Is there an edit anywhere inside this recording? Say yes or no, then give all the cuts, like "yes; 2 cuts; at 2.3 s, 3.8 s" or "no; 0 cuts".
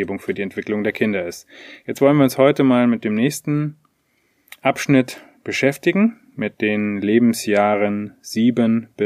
no; 0 cuts